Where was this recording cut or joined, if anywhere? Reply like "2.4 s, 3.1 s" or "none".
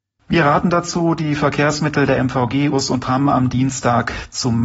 2.7 s